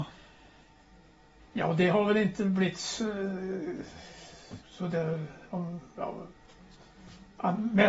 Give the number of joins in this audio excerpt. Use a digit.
1